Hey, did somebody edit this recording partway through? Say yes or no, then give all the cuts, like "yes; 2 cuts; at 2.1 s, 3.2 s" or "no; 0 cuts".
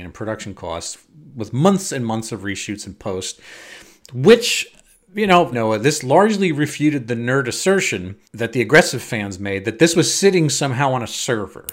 yes; 2 cuts; at 5.5 s, 8.2 s